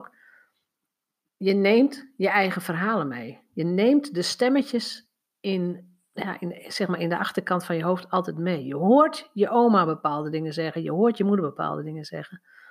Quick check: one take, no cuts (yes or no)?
yes